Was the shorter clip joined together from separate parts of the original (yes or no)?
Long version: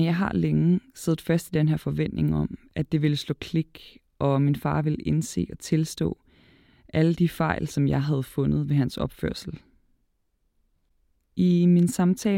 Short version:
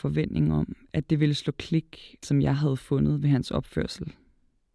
yes